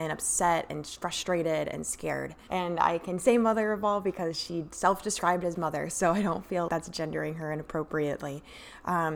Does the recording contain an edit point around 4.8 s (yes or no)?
no